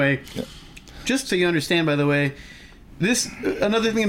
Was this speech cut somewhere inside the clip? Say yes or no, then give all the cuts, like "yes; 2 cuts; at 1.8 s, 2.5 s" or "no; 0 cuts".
yes; 1 cut; at 1.3 s